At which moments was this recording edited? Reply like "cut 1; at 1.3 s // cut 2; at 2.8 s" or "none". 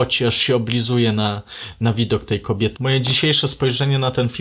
cut 1; at 2.8 s